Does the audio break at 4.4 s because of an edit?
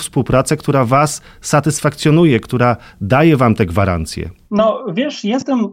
no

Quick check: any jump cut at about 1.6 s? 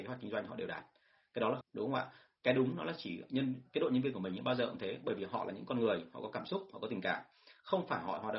yes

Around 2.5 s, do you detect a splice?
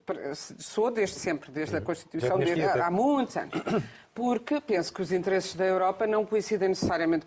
yes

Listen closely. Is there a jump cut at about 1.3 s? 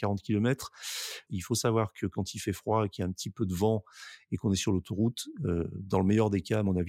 yes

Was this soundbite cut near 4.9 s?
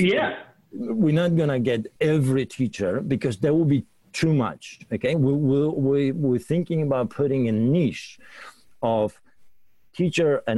no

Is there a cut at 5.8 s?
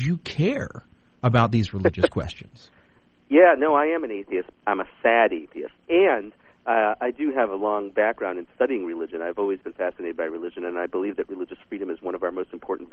yes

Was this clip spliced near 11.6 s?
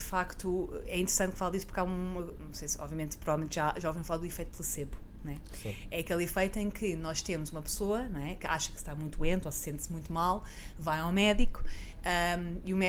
no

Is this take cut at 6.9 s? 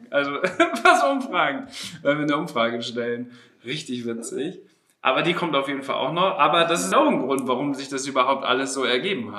yes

